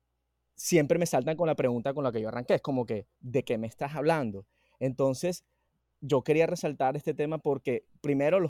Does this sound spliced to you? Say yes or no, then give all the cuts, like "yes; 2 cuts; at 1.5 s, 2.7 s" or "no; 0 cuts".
yes; 1 cut; at 3.2 s